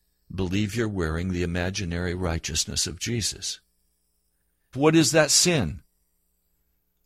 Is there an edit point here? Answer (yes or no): yes